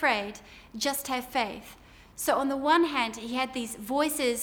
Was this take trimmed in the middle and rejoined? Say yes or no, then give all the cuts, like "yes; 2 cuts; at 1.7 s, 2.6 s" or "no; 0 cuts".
no; 0 cuts